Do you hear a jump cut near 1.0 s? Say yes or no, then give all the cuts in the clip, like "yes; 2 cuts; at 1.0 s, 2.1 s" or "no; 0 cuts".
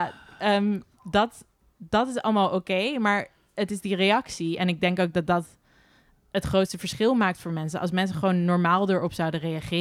no; 0 cuts